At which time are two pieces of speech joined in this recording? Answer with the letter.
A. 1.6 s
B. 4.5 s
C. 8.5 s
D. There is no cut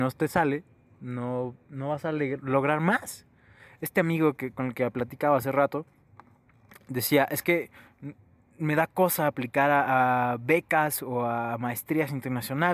D